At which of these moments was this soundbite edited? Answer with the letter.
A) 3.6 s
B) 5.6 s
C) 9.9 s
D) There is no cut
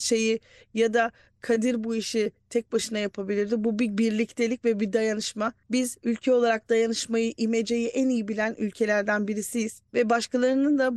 C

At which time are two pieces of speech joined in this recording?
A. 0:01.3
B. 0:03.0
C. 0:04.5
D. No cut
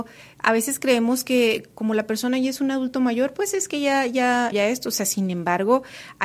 C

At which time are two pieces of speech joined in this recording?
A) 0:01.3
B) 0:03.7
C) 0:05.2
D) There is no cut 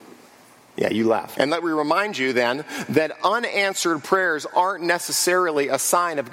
A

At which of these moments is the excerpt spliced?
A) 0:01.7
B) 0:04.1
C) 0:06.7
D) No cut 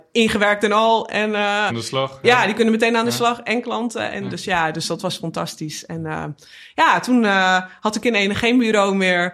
A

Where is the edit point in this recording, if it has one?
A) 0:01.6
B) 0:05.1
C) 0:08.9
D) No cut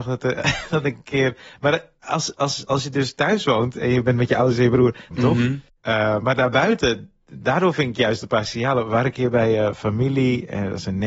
B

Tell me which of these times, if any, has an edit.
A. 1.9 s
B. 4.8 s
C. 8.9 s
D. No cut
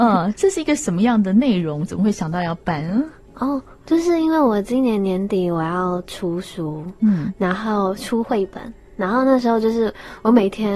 D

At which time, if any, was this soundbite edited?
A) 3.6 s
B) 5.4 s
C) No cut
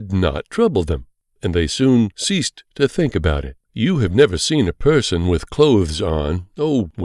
A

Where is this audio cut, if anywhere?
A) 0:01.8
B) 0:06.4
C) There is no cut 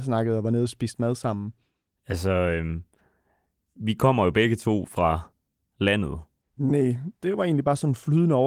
B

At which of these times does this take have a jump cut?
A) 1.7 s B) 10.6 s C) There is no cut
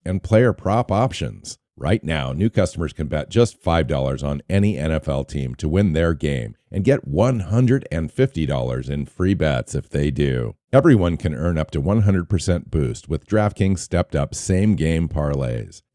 B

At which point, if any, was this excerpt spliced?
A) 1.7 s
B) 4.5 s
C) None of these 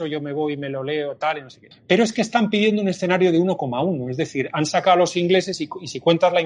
A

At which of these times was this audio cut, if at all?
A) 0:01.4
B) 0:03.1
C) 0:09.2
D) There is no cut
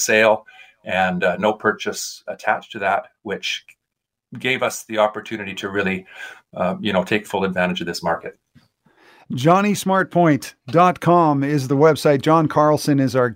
D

